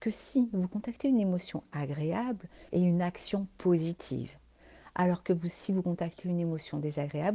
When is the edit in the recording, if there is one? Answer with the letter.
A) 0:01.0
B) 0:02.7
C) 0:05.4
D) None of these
B